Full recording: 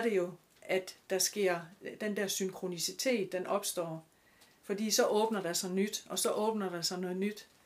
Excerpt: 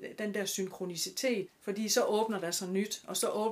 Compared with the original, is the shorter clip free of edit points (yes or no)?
no